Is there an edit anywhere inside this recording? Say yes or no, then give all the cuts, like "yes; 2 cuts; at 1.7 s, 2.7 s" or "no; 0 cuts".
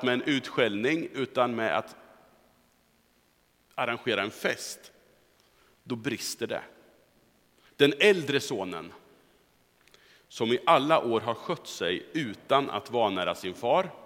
yes; 1 cut; at 7.7 s